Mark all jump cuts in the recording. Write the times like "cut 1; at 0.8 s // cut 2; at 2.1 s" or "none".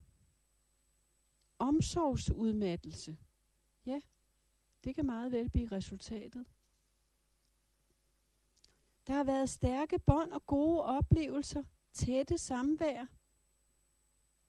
cut 1; at 9.0 s